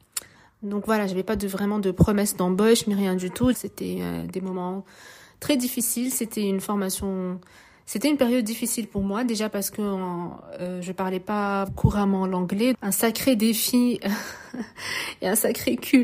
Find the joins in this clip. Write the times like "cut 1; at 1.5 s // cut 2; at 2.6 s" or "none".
cut 1; at 3.5 s // cut 2; at 11.7 s // cut 3; at 12.7 s